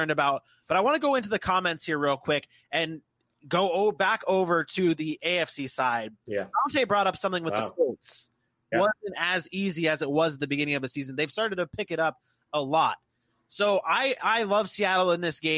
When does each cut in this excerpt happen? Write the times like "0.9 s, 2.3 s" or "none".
8.7 s